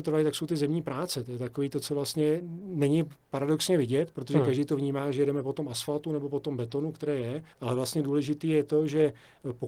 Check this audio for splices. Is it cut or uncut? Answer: cut